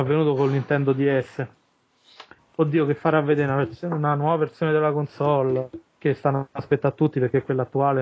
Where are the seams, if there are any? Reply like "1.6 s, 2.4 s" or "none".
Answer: 2.4 s